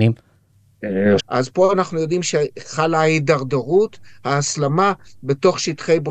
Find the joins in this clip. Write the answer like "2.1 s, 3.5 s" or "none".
1.2 s